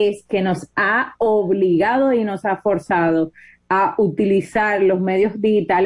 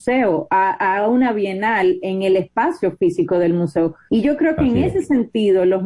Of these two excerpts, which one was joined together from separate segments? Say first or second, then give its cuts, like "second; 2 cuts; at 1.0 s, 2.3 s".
second; 1 cut; at 4.1 s